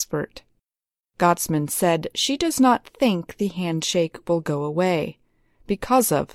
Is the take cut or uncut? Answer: cut